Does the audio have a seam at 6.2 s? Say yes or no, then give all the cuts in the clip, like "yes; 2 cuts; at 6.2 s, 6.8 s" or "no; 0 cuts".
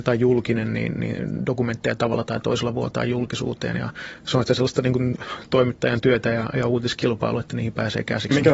no; 0 cuts